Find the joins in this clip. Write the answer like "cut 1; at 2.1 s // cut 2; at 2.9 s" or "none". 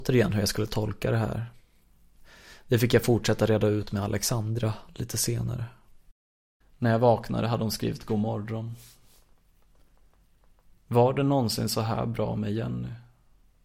none

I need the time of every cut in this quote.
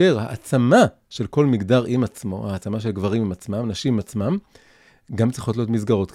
none

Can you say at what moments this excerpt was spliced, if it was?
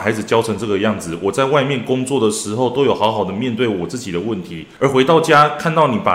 none

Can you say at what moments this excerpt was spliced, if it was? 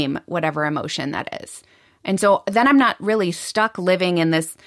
none

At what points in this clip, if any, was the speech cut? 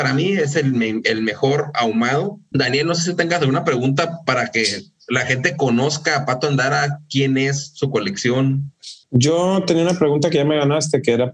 cut 1; at 2.5 s // cut 2; at 9.0 s

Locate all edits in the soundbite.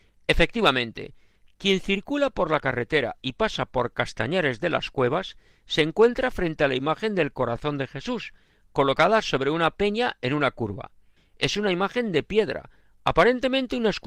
cut 1; at 11.2 s

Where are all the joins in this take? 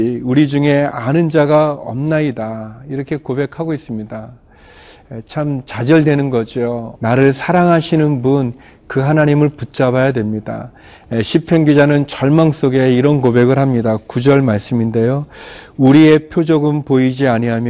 cut 1; at 6.9 s

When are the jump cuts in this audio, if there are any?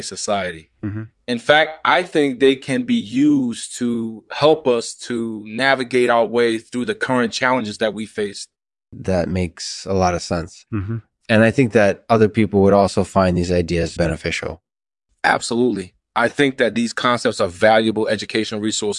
cut 1; at 14.0 s

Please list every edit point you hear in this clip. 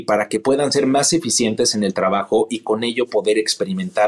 none

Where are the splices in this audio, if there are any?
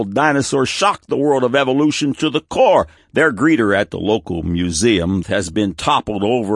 cut 1; at 3.0 s // cut 2; at 5.2 s

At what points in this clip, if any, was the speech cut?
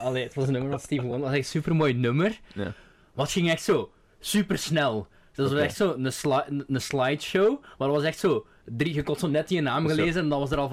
none

